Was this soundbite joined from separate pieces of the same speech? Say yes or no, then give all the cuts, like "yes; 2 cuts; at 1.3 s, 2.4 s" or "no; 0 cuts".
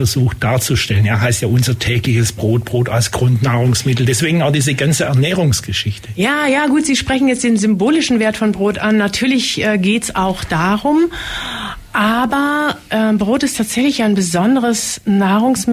no; 0 cuts